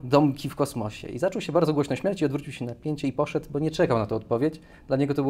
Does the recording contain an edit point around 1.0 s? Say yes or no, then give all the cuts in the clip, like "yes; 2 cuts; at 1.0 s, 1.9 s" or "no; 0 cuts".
no; 0 cuts